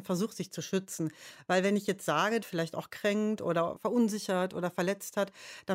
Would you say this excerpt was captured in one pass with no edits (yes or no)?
no